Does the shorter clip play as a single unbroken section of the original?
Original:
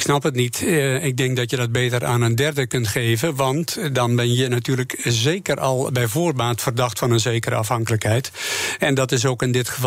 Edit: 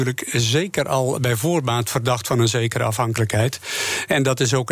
yes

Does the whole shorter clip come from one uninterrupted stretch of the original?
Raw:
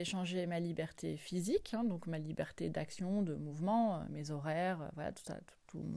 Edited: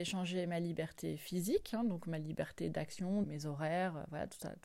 no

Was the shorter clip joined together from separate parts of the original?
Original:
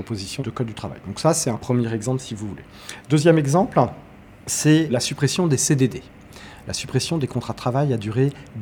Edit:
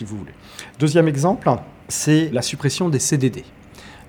yes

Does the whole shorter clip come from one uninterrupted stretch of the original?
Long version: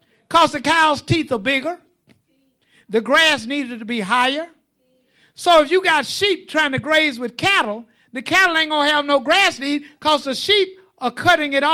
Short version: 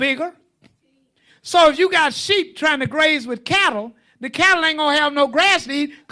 no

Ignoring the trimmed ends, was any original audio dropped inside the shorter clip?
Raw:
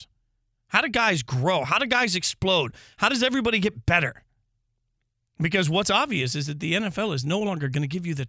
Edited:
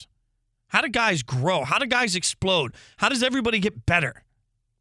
no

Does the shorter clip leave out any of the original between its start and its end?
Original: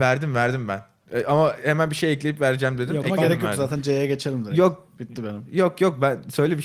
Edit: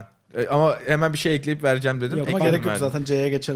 no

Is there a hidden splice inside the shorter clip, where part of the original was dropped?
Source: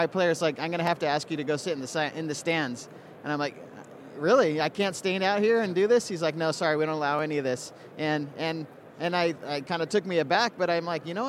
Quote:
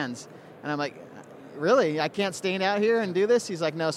no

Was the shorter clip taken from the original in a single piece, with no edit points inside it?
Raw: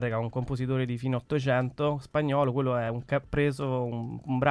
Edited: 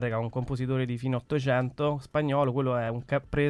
yes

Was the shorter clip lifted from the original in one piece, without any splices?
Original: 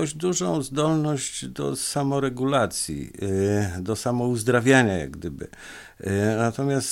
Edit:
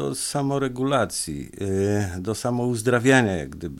yes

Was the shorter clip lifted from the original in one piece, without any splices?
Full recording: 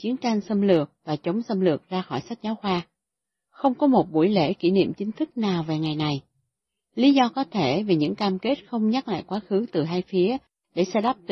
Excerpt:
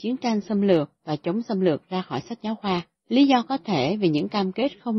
no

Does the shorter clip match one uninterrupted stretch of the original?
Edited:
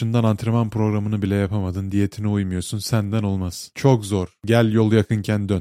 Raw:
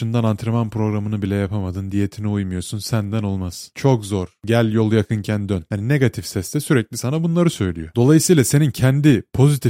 yes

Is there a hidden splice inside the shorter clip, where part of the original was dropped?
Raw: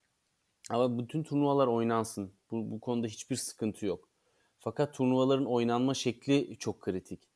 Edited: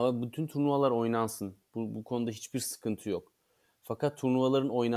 no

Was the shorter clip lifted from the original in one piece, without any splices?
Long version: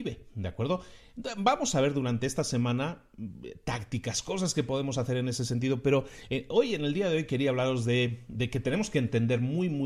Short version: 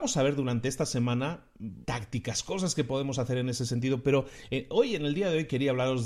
no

